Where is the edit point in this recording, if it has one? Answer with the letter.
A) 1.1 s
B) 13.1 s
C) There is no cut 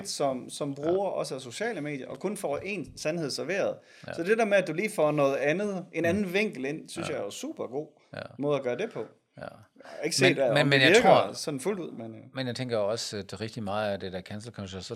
C